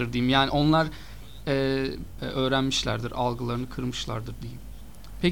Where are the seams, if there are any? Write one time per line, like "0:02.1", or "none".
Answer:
0:02.2